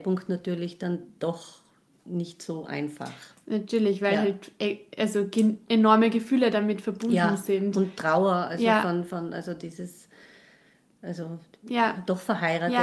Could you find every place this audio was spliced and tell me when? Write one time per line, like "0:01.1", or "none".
none